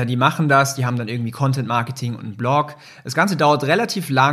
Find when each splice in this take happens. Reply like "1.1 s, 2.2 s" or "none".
none